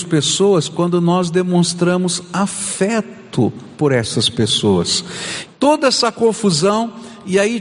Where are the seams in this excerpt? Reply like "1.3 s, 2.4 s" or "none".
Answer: 5.5 s